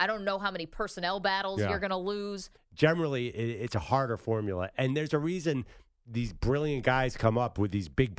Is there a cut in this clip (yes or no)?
yes